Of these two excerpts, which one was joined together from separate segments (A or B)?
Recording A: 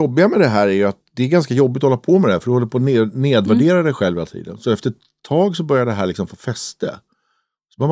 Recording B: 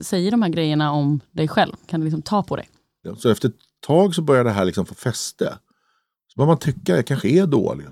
B